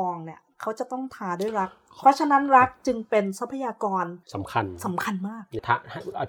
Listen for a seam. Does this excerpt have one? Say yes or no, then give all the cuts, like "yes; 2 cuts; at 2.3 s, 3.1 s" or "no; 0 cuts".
yes; 1 cut; at 4.2 s